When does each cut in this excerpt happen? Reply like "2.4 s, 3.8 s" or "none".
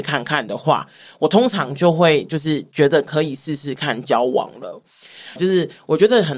5.4 s